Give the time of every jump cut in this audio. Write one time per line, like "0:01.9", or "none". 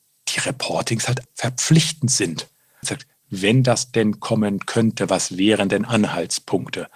0:01.2
0:02.8